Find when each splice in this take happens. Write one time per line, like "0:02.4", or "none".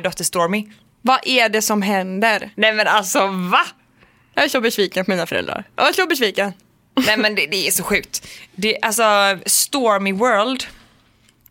none